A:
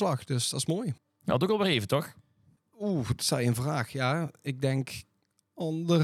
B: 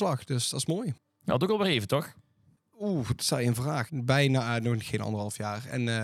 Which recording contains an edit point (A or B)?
B